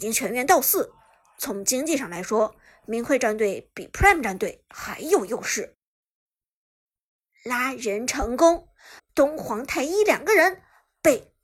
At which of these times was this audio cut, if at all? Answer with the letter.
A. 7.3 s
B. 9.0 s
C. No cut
B